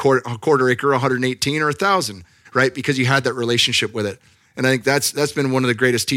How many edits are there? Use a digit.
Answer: 0